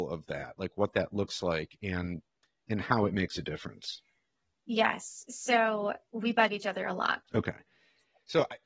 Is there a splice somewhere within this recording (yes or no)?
yes